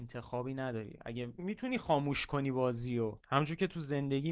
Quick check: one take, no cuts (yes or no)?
no